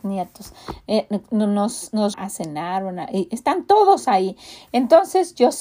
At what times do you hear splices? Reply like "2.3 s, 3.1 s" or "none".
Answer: 2.1 s